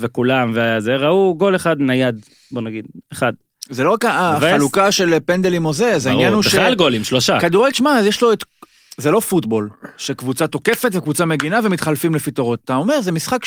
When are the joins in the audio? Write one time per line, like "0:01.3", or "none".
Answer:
0:07.7